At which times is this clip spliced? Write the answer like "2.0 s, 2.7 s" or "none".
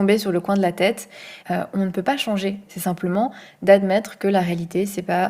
1.4 s, 2.6 s